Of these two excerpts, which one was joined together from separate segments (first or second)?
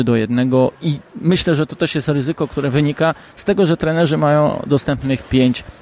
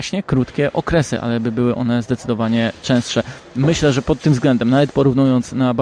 first